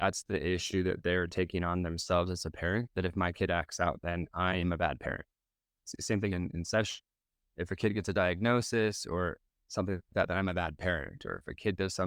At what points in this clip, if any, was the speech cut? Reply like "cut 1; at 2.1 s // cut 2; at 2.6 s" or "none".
none